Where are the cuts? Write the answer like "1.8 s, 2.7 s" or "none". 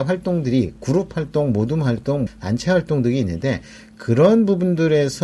2.3 s